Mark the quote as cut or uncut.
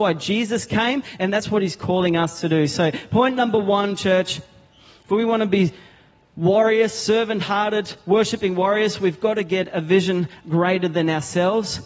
uncut